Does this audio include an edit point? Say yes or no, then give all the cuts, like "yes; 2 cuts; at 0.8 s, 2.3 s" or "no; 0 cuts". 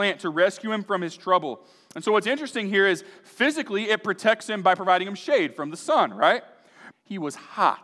yes; 1 cut; at 6.9 s